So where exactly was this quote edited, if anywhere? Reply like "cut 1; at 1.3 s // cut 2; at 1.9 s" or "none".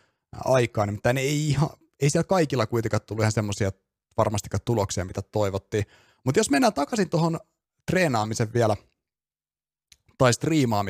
none